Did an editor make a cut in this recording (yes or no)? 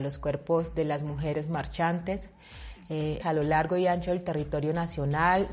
yes